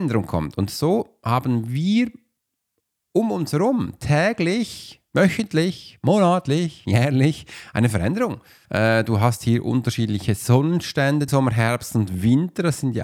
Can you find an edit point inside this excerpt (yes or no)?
yes